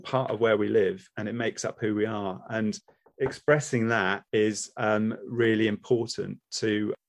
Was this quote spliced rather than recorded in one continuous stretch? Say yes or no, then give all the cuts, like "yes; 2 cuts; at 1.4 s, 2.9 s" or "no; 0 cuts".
yes; 1 cut; at 4.3 s